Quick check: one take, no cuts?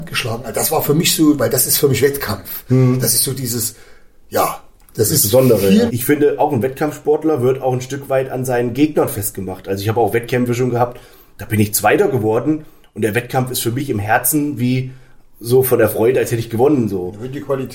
no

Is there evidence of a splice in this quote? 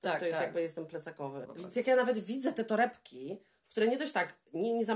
yes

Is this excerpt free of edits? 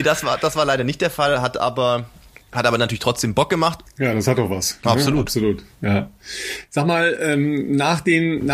no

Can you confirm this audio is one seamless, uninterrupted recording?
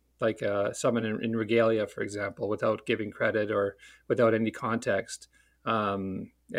yes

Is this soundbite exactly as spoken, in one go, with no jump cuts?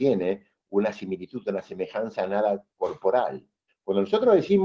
no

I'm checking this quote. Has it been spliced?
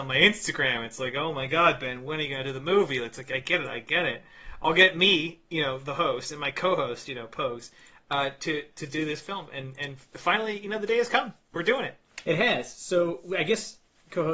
yes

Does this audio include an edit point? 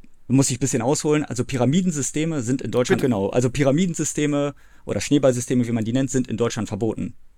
yes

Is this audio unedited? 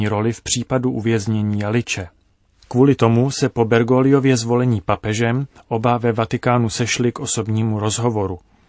yes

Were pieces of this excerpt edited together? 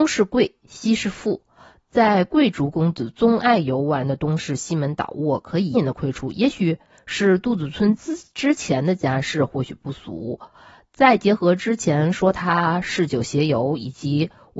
yes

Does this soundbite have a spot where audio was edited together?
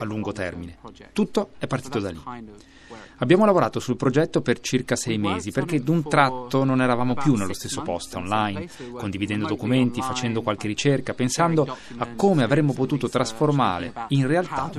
yes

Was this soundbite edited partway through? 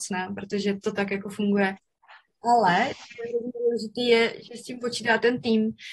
yes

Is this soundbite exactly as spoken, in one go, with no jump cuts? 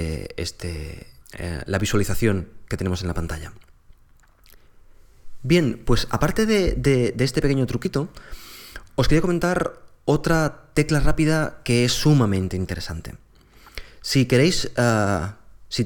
no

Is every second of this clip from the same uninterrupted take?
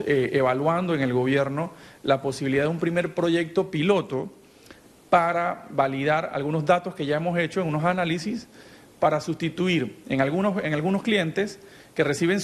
yes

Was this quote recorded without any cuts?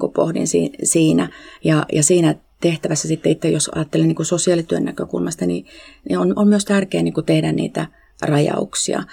yes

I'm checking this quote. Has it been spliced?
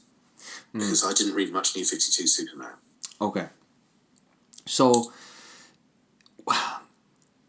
no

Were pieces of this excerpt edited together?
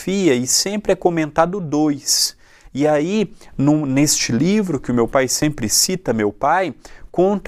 no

